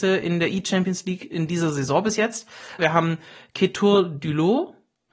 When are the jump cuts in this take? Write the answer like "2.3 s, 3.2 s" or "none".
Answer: 2.8 s